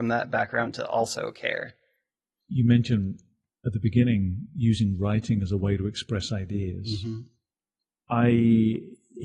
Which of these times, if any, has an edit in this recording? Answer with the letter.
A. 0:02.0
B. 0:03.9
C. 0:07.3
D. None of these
D